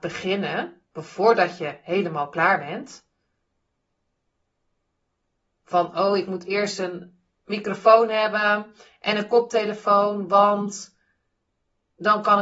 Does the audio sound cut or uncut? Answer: uncut